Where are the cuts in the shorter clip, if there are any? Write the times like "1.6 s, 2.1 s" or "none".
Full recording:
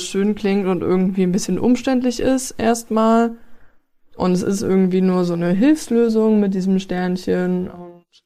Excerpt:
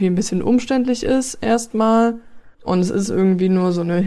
2.5 s